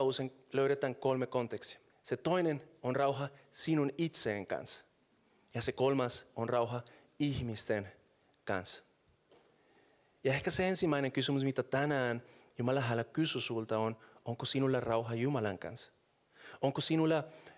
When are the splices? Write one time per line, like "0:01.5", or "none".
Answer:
0:01.9